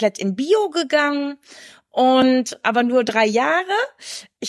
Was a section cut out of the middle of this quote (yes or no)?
yes